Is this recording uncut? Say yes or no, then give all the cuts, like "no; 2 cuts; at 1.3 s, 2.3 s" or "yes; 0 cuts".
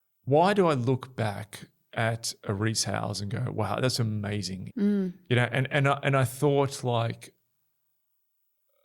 no; 2 cuts; at 4.7 s, 5.7 s